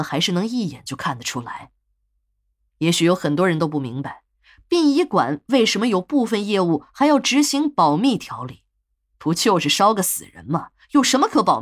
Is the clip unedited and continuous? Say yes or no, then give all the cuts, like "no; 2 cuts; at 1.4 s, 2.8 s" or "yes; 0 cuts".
yes; 0 cuts